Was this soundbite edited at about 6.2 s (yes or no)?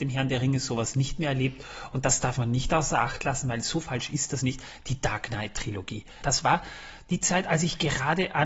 yes